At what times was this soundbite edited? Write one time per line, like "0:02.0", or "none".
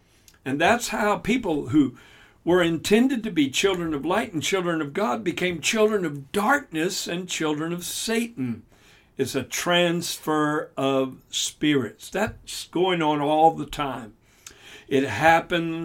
none